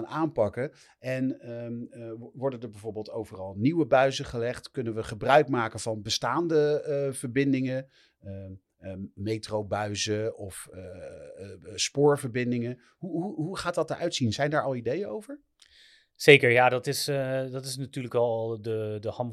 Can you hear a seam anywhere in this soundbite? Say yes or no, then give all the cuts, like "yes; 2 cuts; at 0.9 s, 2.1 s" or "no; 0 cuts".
no; 0 cuts